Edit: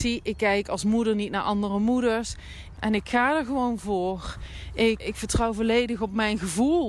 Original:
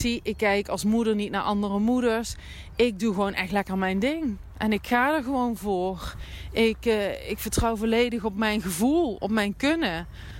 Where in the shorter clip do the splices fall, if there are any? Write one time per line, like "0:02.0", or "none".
0:02.8
0:05.0